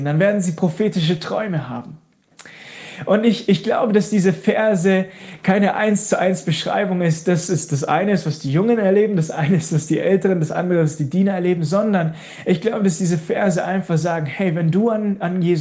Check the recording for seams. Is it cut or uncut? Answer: uncut